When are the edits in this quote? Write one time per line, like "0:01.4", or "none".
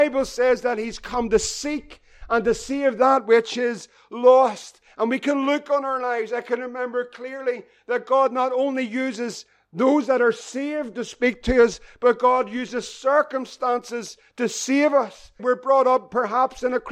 0:15.4